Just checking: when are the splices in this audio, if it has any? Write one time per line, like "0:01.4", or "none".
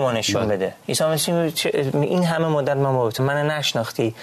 0:03.2

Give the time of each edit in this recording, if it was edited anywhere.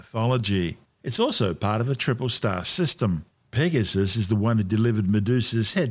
0:01.0
0:03.3

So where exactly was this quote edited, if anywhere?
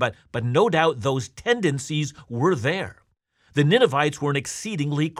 none

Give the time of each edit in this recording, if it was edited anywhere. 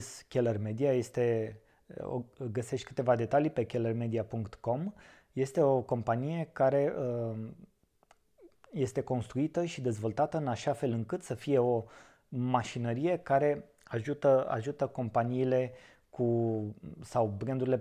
none

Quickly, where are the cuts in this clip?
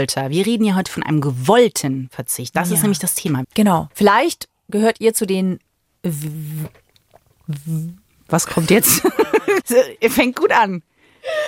0:03.4
0:09.6

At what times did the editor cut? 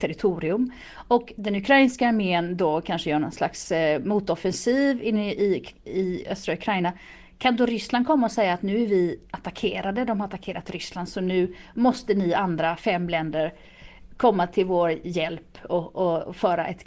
none

